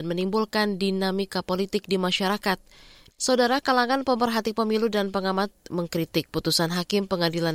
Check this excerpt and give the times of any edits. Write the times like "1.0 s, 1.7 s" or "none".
3.1 s